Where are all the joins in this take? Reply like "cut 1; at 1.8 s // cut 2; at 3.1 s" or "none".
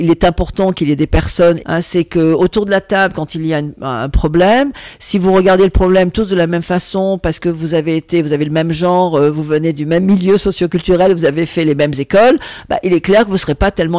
cut 1; at 1.6 s